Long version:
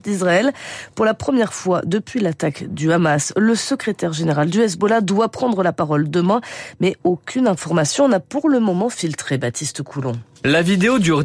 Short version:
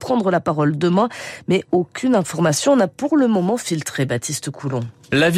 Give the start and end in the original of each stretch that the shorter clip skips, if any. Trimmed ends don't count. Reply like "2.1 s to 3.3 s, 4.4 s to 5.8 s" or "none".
none